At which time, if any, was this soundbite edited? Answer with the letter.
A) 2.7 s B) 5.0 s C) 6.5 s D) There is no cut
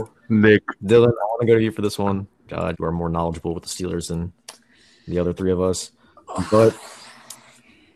A